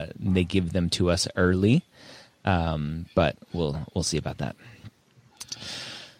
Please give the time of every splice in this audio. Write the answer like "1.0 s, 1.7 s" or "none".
none